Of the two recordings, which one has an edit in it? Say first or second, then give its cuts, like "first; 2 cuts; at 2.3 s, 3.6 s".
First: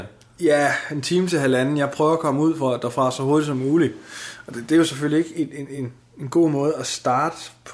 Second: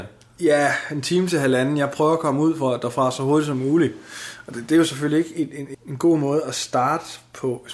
second; 1 cut; at 5.7 s